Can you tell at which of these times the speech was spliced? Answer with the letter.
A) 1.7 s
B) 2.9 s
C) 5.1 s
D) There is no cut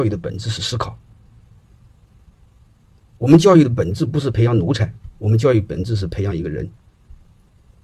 D